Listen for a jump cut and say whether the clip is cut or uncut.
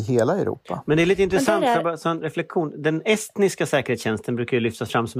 uncut